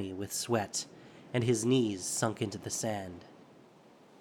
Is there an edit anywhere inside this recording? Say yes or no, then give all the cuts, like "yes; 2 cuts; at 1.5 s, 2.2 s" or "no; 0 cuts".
no; 0 cuts